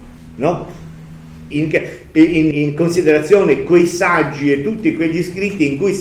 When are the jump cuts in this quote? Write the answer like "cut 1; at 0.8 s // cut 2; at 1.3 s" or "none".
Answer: cut 1; at 1.5 s // cut 2; at 2.5 s